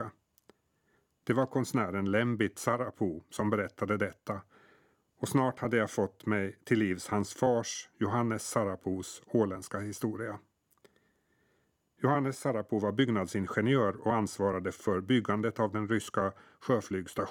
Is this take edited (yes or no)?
no